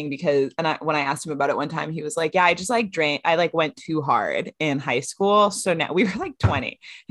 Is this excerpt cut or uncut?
uncut